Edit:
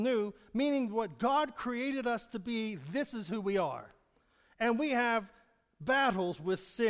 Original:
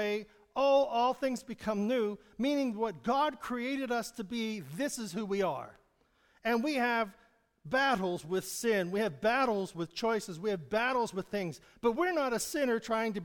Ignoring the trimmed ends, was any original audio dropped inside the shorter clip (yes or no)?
no